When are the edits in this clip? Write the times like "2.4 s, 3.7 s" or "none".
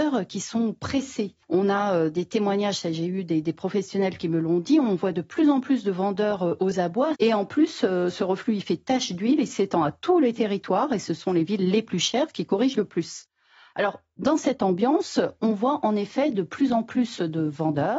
1.4 s, 7.1 s